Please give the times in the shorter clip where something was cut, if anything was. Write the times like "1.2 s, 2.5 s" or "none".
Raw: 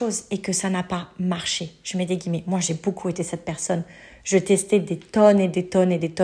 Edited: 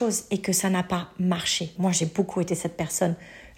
1.7 s

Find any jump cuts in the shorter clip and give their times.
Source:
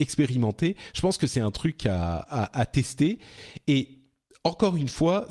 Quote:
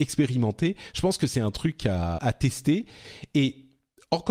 2.2 s

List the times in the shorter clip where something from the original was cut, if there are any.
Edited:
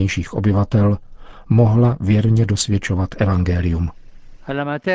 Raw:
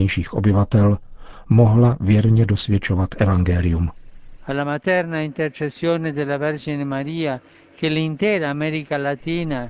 none

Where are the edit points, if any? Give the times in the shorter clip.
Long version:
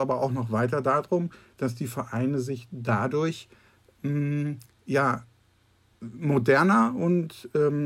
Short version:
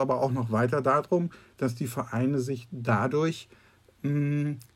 none

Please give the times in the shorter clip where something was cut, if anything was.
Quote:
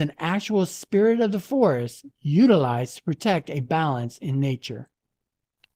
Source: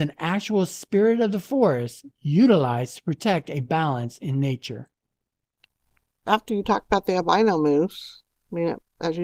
none

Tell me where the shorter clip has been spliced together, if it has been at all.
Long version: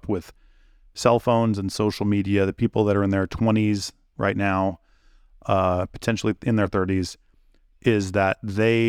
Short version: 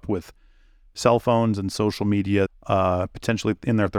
2.5 s

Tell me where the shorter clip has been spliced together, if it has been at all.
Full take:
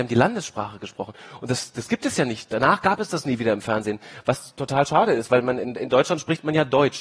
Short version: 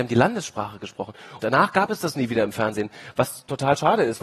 1.4 s

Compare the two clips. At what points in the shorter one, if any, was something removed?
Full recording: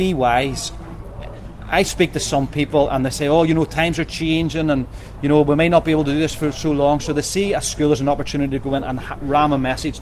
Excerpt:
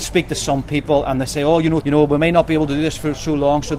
1.8 s

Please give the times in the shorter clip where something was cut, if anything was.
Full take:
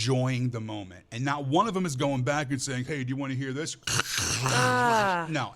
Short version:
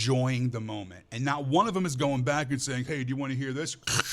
none

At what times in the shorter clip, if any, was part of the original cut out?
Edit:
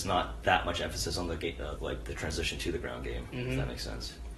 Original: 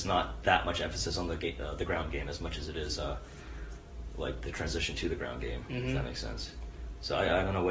1.8 s

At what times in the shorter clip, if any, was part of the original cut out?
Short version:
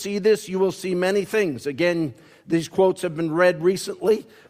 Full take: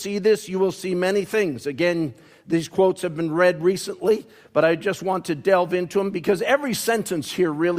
none

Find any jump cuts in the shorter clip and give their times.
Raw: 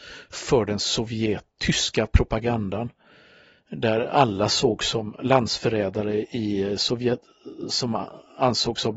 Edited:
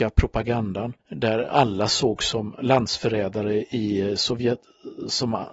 1.0 s

